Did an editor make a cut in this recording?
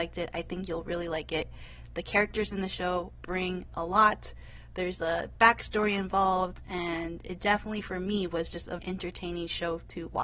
yes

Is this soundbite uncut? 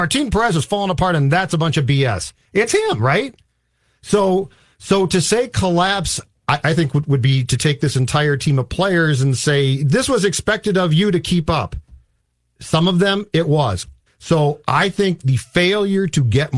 no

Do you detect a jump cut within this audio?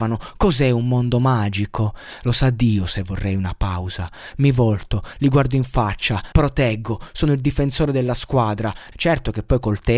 yes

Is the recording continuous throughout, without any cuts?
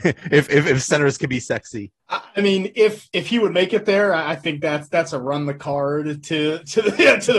no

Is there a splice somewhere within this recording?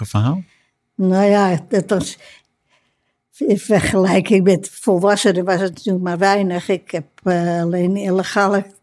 no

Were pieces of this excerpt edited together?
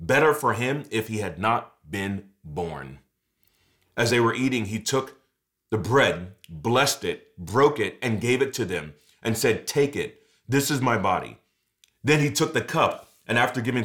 no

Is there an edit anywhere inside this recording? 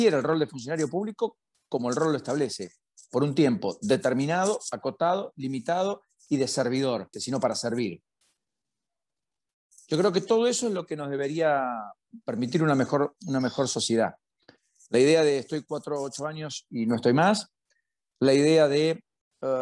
yes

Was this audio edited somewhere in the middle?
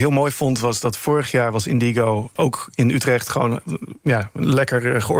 yes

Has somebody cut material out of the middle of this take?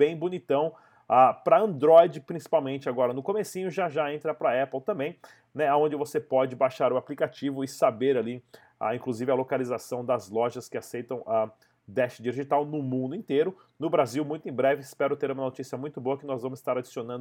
no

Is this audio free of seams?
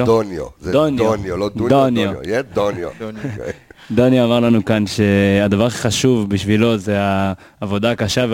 yes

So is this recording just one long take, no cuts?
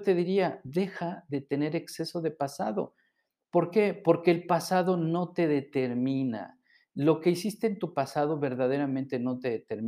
yes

